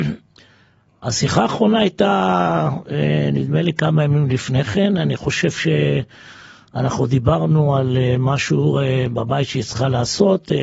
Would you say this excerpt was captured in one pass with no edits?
yes; 0 cuts

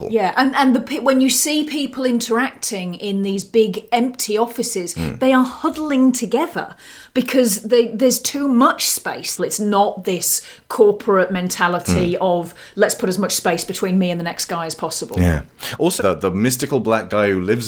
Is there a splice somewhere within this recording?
yes; 2 cuts; at 9.4 s, 16.0 s

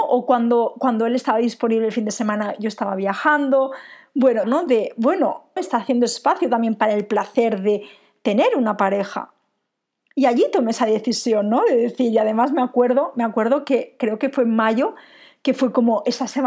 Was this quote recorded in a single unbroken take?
no; 2 cuts; at 4.4 s, 5.6 s

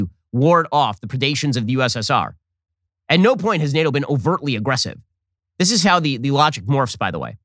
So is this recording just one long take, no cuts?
no; 1 cut; at 5.4 s

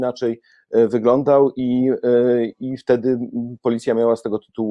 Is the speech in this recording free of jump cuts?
yes; 0 cuts

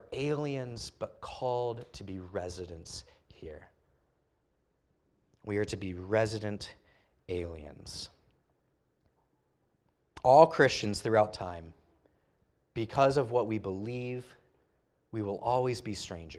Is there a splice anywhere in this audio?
no; 0 cuts

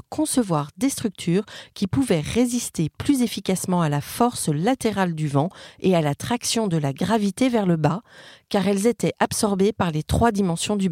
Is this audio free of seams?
yes; 0 cuts

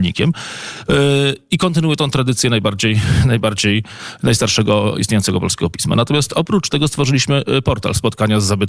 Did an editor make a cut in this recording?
no; 0 cuts

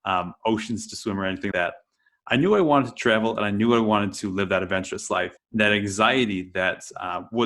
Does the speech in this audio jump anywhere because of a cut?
yes; 2 cuts; at 1.5 s, 5.4 s

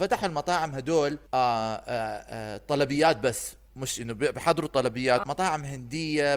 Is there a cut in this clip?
yes; 2 cuts; at 1.3 s, 5.2 s

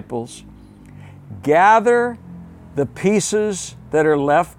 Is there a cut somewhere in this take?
no; 0 cuts

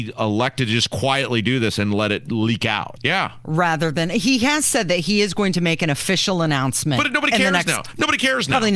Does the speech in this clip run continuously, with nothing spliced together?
no; 1 cut; at 3.0 s

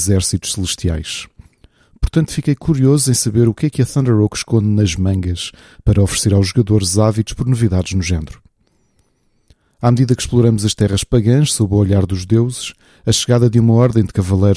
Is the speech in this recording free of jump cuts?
yes; 0 cuts

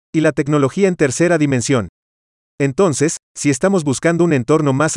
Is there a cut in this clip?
no; 0 cuts

